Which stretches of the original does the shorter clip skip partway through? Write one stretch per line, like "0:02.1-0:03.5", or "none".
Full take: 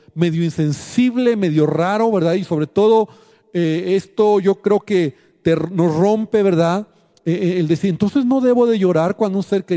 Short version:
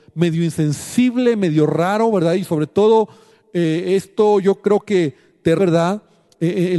0:05.6-0:06.4

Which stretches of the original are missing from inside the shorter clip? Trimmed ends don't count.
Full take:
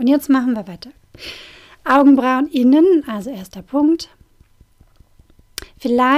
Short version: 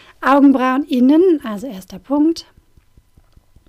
none

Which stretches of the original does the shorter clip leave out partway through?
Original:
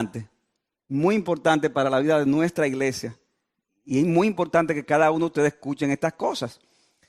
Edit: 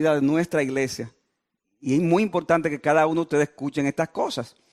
none

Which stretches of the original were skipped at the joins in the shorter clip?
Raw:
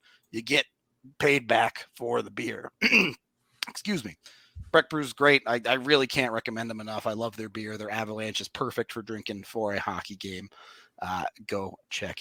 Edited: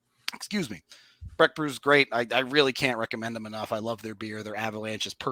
none

